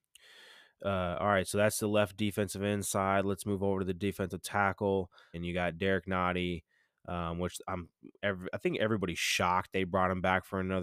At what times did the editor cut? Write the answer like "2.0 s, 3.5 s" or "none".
5.3 s